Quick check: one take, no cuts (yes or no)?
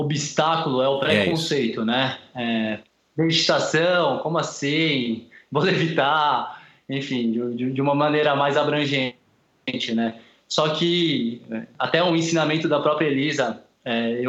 yes